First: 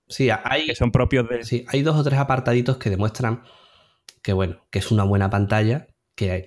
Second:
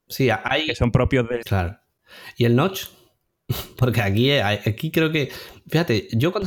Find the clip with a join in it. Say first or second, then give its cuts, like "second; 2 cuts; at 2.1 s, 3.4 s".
second; 1 cut; at 1.4 s